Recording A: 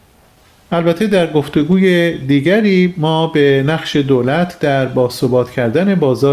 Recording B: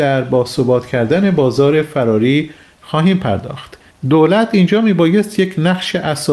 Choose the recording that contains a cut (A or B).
B